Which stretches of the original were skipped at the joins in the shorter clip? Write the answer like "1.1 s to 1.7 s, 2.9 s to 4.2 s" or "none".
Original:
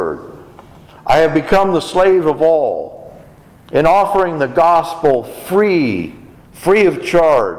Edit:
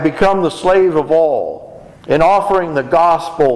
3.3 s to 3.6 s